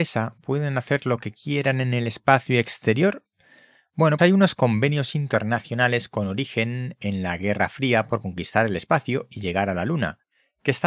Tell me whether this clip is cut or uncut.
cut